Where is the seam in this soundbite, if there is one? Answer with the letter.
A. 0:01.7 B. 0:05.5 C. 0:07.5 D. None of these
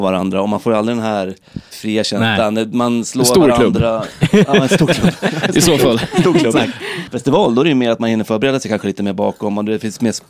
A